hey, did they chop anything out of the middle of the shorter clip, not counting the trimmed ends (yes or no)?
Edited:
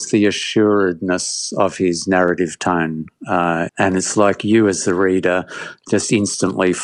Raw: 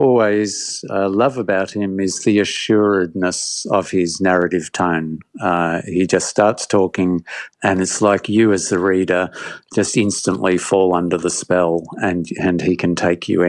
yes